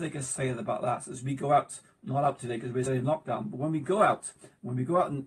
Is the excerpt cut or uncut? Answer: cut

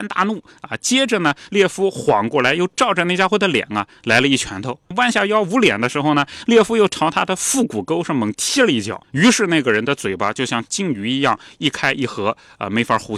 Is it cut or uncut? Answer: uncut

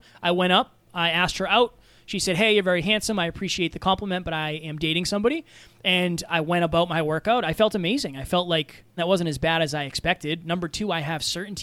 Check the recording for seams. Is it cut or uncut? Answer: cut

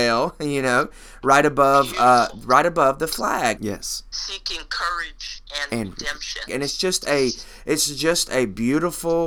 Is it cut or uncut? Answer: cut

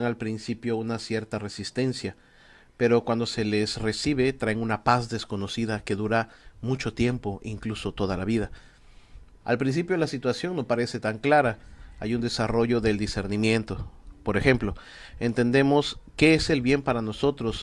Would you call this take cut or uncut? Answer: cut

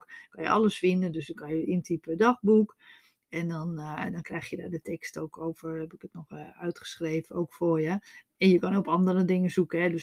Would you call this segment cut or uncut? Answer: uncut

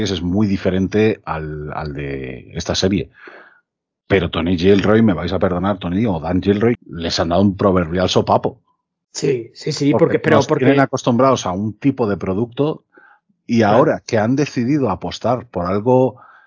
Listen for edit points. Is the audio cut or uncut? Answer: cut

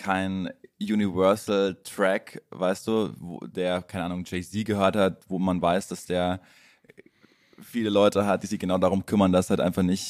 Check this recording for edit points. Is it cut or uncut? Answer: uncut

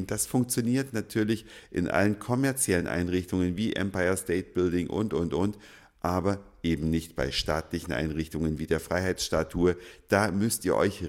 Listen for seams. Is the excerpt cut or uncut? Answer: uncut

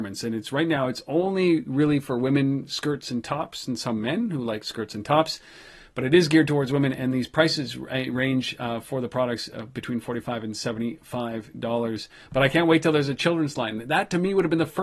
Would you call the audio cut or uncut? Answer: uncut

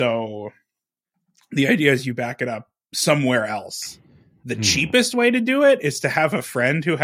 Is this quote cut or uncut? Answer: uncut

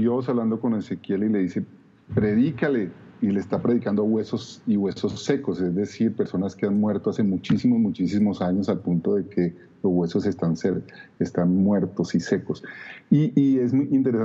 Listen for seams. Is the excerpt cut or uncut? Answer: uncut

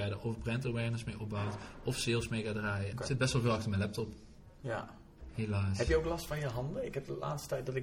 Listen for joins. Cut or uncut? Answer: cut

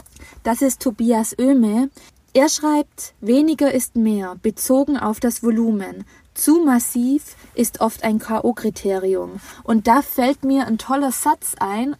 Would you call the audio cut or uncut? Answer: uncut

